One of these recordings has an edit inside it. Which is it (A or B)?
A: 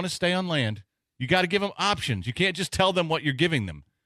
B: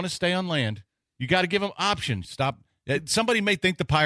B